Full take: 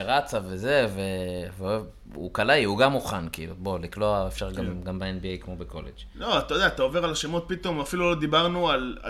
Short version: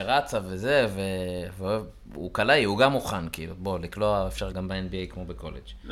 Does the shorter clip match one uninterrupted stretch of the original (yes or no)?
no